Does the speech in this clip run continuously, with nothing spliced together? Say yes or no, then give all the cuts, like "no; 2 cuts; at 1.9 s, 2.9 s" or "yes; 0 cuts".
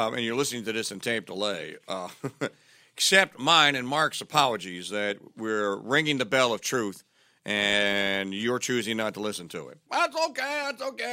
no; 1 cut; at 9.9 s